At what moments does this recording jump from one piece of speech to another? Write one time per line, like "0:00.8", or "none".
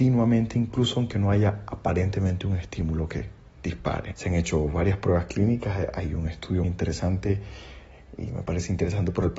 0:04.1
0:06.6